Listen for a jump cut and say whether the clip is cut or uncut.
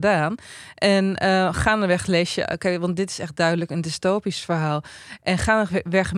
uncut